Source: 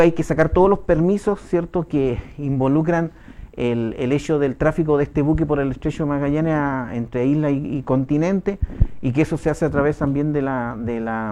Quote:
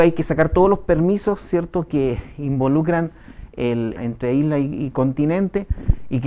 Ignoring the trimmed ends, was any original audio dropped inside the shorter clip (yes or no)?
yes